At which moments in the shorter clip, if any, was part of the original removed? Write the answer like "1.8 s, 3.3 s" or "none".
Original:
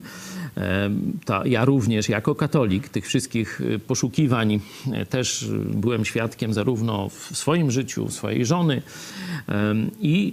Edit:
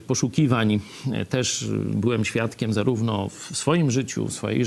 none